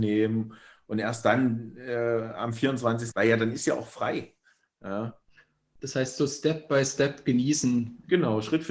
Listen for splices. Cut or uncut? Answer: cut